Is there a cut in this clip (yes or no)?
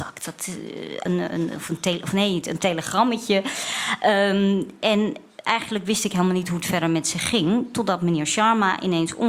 yes